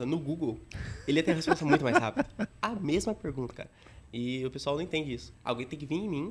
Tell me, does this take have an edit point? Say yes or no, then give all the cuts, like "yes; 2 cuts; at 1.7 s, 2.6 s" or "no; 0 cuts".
yes; 2 cuts; at 4.0 s, 5.3 s